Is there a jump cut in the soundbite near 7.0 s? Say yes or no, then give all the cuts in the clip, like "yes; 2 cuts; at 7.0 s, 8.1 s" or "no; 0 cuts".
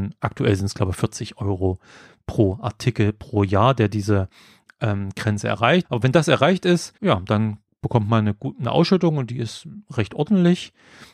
yes; 2 cuts; at 5.8 s, 7.0 s